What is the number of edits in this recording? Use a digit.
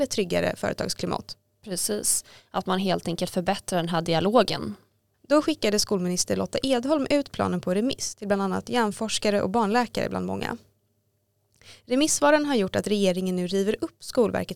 1